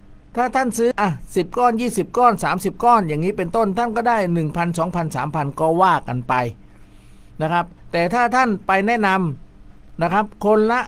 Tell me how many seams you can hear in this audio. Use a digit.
1